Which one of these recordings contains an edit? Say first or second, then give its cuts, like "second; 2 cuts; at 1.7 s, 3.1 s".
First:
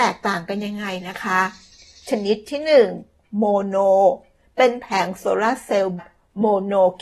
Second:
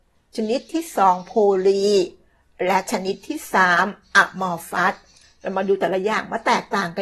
first; 1 cut; at 6.0 s